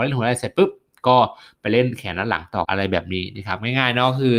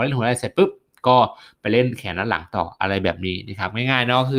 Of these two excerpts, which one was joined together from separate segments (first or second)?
first